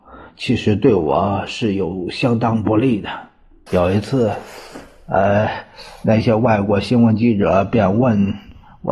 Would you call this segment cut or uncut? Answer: cut